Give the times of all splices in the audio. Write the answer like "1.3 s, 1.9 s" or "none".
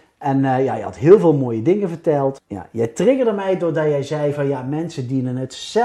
none